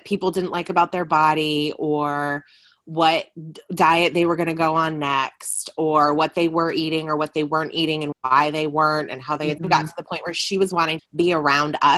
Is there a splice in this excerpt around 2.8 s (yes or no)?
no